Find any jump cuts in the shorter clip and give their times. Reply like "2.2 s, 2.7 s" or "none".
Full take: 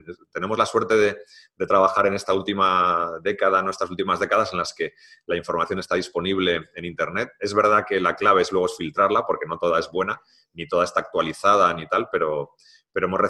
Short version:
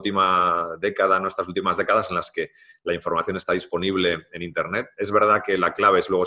none